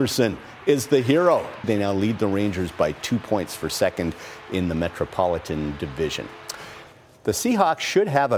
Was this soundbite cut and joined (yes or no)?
yes